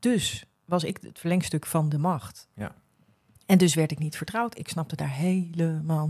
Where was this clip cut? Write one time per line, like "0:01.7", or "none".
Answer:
none